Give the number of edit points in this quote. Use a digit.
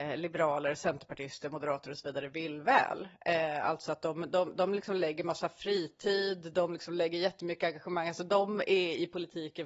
0